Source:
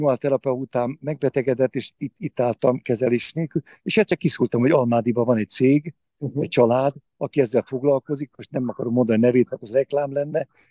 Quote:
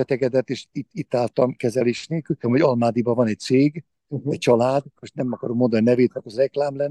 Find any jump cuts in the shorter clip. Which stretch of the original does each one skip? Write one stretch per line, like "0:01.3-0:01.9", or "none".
0:03.7-0:04.5
0:07.0-0:08.3